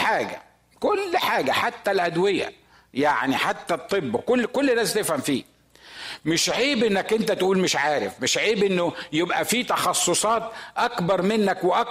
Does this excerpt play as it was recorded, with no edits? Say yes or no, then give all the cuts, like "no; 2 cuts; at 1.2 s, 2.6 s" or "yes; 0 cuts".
yes; 0 cuts